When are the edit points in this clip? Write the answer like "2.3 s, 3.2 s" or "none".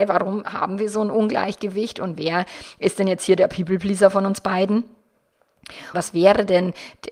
5.9 s